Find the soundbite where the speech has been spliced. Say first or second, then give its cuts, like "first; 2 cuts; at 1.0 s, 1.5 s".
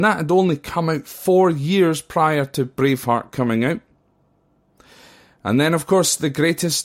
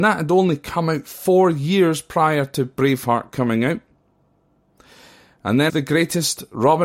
second; 1 cut; at 5.7 s